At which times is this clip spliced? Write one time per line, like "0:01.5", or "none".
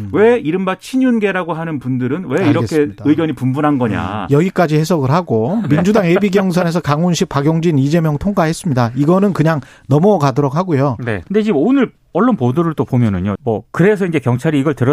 0:11.2
0:13.4